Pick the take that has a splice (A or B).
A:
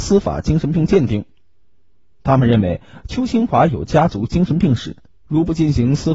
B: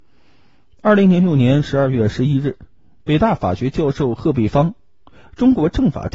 A